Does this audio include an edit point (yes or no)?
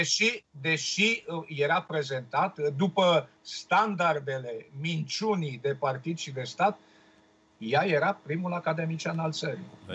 no